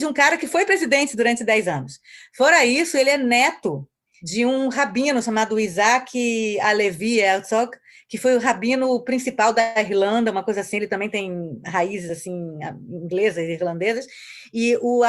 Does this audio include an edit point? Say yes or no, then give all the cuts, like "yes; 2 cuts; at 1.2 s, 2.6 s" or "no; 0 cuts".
no; 0 cuts